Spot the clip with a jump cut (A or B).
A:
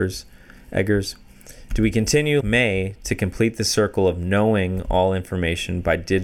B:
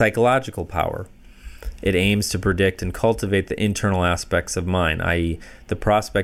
A